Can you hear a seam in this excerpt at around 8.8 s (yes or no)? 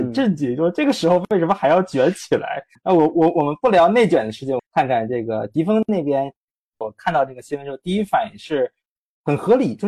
no